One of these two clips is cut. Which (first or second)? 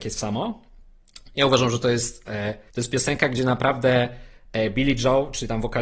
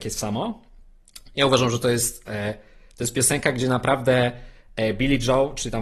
first